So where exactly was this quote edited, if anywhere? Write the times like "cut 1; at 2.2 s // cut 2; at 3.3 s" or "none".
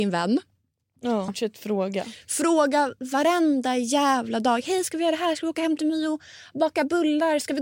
cut 1; at 1.3 s